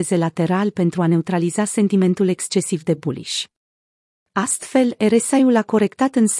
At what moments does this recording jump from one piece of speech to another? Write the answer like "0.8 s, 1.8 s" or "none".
none